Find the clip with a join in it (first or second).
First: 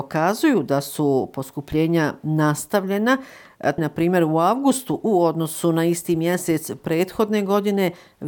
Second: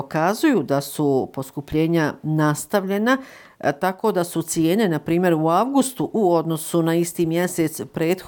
first